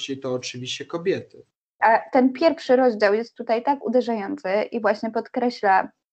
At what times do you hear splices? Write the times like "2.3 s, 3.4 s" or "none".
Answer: 1.8 s